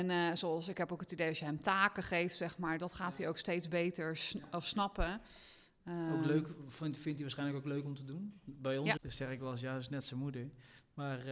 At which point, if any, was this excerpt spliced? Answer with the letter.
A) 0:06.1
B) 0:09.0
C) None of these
B